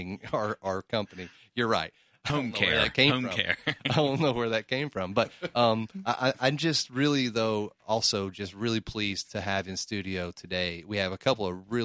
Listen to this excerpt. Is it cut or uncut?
cut